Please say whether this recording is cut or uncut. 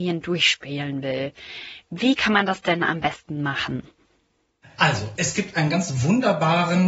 cut